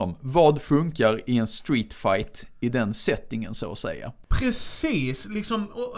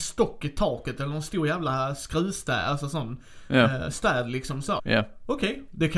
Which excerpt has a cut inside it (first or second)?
second